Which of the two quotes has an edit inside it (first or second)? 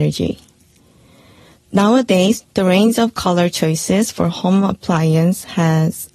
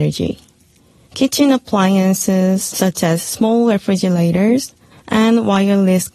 second